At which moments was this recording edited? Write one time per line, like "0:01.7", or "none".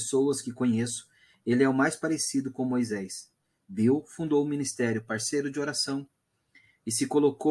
none